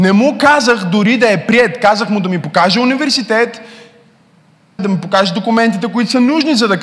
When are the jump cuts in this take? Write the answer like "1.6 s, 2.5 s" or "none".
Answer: 4.8 s